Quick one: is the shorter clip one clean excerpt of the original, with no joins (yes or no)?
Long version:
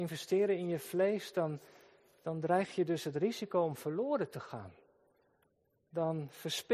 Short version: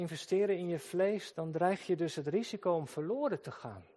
no